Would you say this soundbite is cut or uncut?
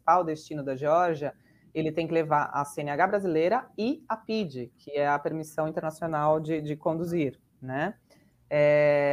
uncut